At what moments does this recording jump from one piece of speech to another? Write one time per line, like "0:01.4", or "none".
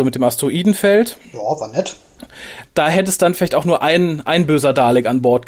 0:02.7